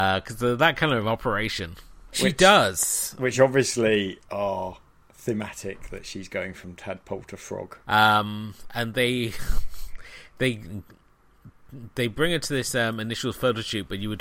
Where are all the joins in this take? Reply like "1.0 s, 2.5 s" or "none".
2.1 s, 7.8 s

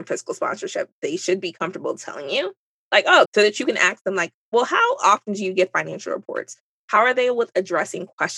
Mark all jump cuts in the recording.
3.2 s

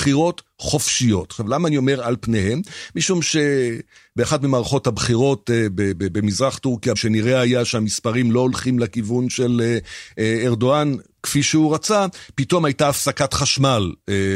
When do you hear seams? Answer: 7.0 s

